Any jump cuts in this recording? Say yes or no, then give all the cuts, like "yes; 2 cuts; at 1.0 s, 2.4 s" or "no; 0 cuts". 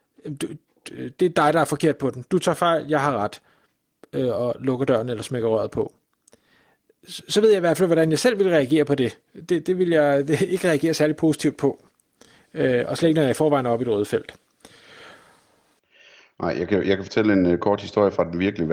no; 0 cuts